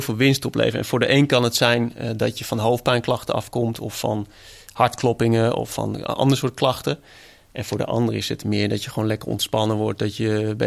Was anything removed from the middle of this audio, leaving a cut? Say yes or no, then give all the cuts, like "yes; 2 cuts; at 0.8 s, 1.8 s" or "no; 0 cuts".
no; 0 cuts